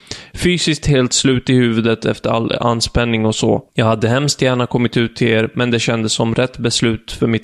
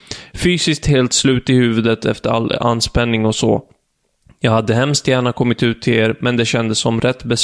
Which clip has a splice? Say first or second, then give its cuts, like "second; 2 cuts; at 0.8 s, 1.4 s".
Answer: first; 1 cut; at 3.7 s